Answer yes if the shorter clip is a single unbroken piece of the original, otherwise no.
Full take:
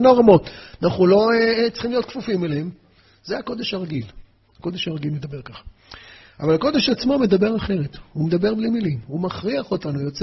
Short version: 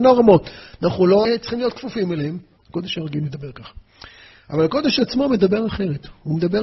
no